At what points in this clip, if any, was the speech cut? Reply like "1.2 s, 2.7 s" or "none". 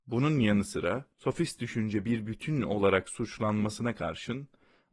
1.1 s

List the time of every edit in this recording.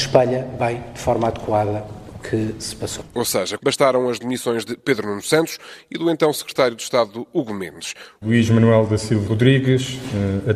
3.6 s, 8.2 s, 9.3 s

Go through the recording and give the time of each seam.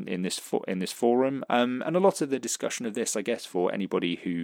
1.5 s

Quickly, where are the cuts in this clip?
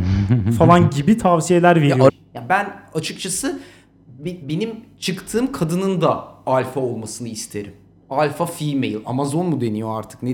2.1 s

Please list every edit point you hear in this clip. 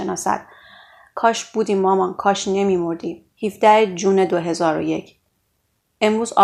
3.3 s

